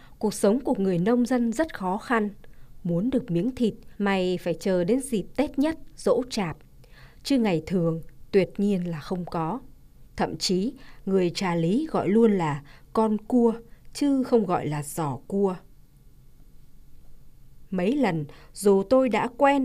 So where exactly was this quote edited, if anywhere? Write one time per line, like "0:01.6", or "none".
0:04.0
0:10.1